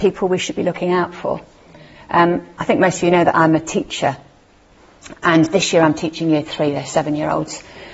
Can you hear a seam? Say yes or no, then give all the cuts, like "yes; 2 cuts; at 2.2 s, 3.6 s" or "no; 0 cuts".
no; 0 cuts